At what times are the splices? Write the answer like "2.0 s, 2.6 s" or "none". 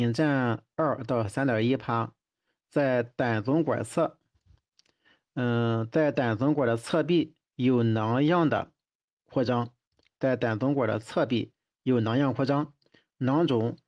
none